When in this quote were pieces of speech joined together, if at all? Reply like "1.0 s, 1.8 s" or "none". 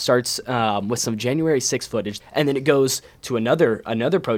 2.2 s